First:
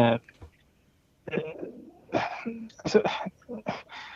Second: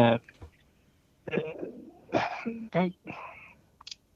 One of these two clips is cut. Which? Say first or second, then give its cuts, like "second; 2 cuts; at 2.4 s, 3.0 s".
second; 1 cut; at 2.7 s